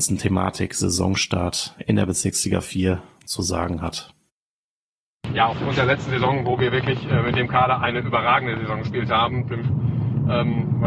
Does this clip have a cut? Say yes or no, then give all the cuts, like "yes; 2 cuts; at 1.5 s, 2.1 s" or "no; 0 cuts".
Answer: yes; 1 cut; at 9.6 s